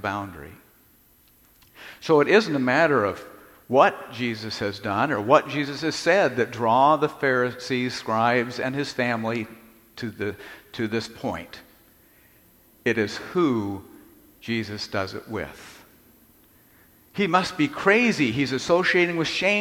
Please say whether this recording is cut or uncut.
uncut